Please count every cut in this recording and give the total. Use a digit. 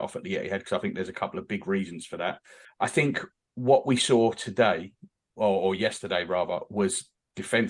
1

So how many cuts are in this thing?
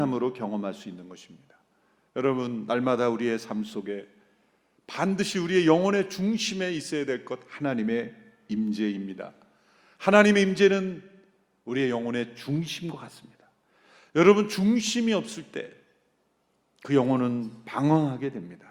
0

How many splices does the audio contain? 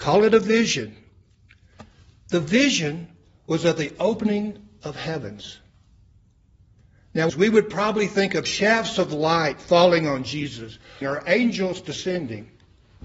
2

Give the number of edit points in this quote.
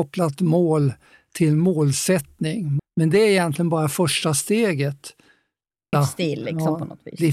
2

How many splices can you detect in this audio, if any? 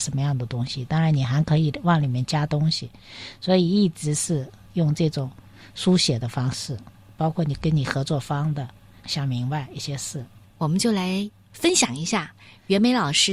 2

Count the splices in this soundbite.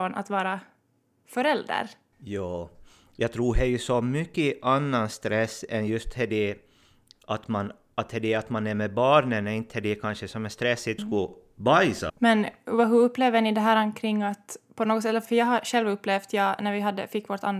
3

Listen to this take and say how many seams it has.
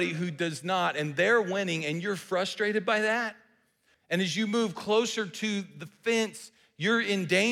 1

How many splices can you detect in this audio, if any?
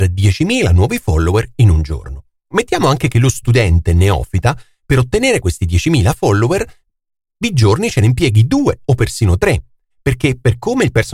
1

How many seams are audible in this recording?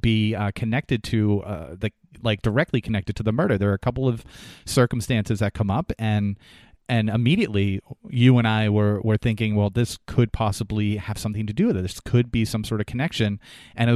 0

